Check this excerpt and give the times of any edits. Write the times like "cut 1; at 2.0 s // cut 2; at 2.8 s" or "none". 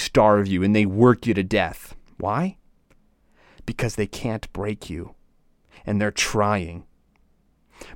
none